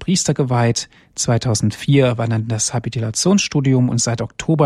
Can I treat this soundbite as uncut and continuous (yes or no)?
yes